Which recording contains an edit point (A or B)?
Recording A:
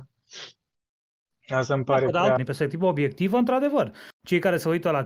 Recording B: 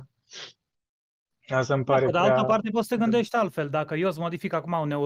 A